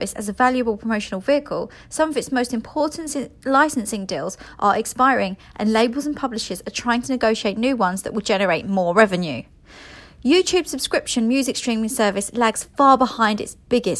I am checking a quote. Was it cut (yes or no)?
no